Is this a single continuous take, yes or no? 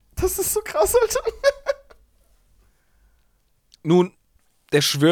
yes